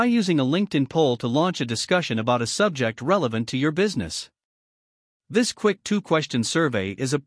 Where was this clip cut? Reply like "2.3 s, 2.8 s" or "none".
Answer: none